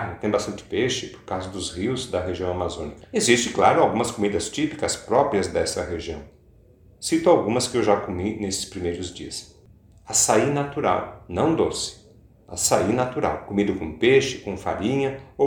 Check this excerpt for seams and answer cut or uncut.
cut